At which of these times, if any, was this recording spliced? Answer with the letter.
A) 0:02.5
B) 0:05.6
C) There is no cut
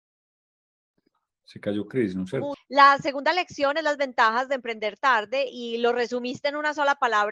A